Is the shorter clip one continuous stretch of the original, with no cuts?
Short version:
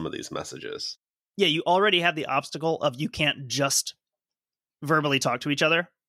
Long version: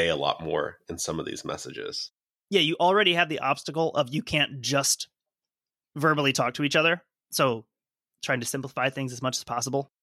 yes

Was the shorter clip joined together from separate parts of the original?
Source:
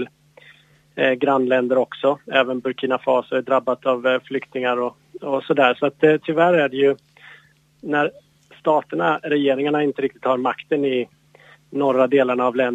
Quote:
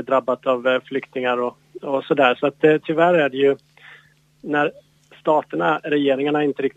no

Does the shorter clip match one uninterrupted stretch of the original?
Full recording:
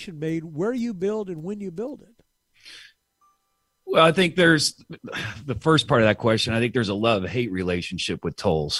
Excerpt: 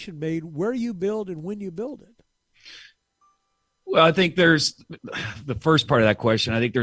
yes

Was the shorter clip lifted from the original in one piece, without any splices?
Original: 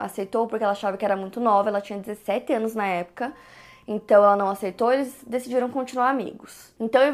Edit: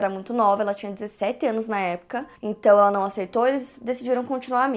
no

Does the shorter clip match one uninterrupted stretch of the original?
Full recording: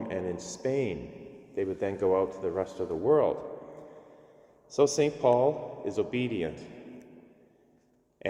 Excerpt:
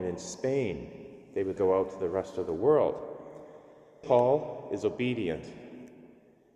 no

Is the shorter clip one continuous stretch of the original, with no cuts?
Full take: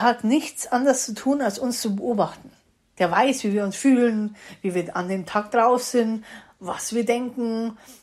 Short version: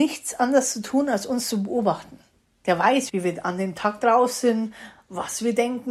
no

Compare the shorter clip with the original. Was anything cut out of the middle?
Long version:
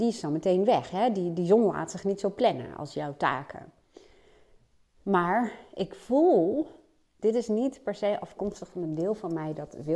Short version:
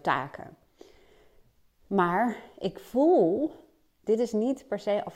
no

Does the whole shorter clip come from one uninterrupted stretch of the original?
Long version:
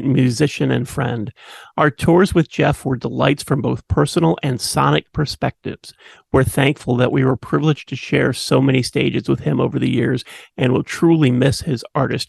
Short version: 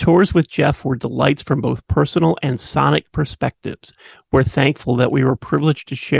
yes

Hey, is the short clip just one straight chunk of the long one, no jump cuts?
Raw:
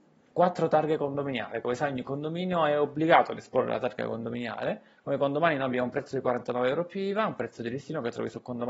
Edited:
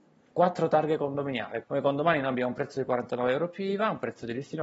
no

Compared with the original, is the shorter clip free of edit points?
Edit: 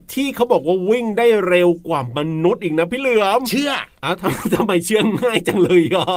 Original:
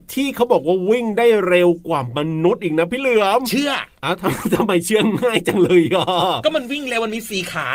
yes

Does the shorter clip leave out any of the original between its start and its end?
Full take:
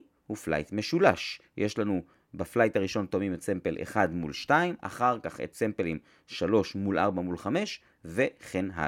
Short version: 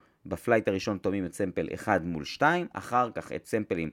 no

